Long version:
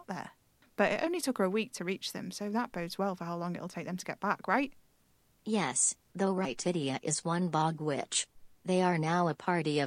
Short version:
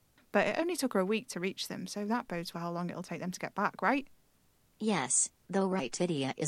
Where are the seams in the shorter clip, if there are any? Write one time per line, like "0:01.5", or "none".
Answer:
0:02.5